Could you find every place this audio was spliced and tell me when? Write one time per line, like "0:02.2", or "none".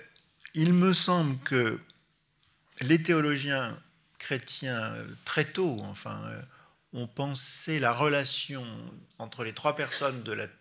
none